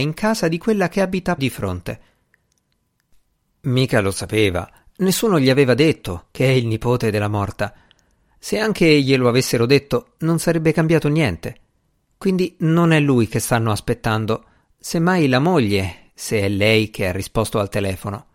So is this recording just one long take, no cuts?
no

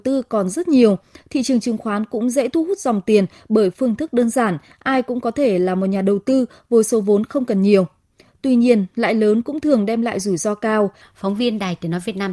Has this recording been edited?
yes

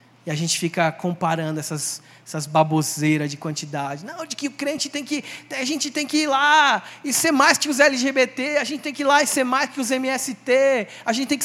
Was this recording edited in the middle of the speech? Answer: no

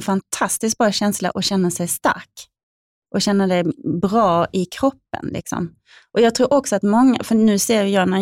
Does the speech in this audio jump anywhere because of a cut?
no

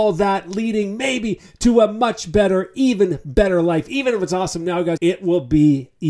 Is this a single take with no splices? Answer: no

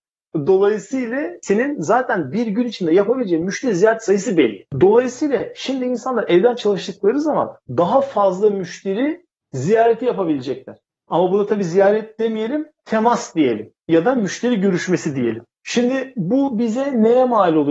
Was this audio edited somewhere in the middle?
no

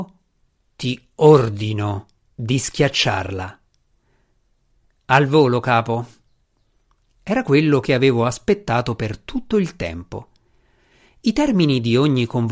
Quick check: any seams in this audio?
no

